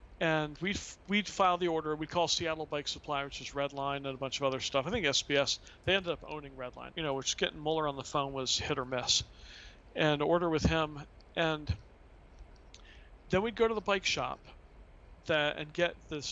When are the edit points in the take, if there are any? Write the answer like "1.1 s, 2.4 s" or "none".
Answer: 6.9 s